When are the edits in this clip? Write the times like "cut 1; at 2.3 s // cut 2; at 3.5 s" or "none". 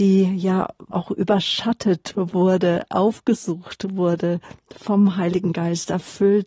cut 1; at 0.9 s